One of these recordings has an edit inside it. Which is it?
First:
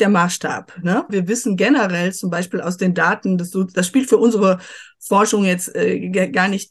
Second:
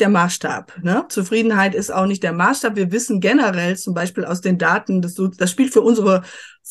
first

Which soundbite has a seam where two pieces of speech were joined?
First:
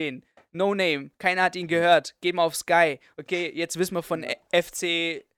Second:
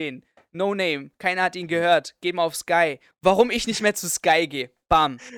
second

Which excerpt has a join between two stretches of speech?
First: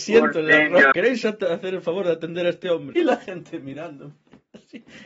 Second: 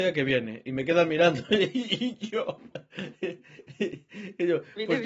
first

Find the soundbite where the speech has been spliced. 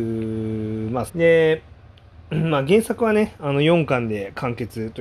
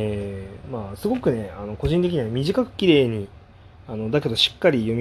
first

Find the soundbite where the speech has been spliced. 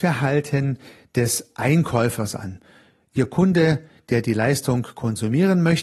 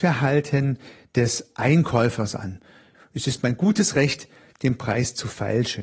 second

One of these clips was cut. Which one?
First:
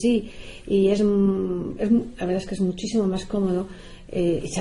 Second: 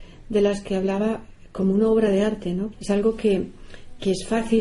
second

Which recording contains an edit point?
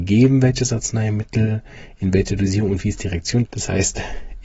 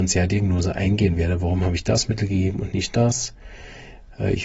first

